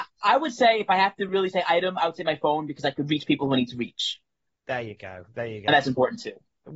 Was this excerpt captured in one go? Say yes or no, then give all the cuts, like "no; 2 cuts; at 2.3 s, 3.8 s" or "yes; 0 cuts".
yes; 0 cuts